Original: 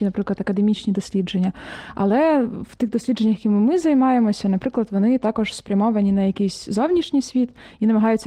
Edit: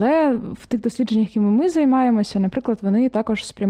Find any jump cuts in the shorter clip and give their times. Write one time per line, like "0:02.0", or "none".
none